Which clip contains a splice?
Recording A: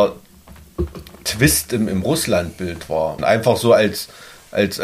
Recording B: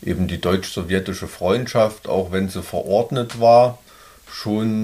A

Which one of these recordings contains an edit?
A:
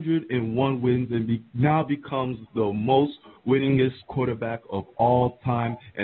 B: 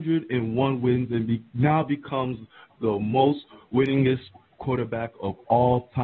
A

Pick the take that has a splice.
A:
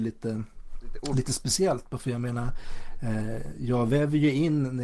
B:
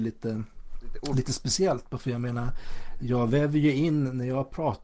B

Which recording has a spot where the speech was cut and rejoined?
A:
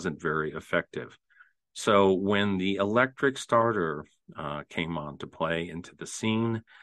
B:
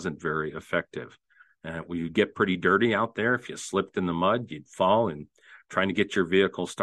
B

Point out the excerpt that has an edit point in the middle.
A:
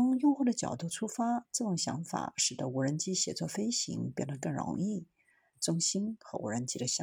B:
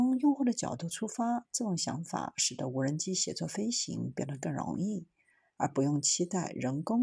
A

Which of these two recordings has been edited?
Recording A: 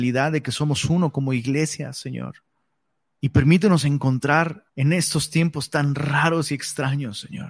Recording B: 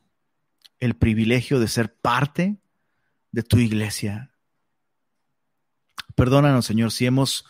A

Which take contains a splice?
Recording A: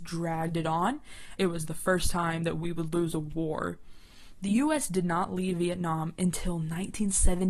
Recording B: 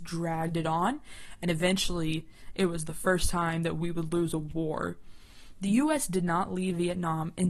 A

